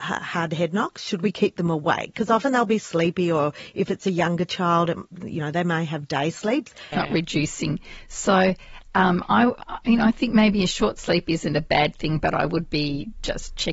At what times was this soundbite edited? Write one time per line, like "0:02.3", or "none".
0:06.9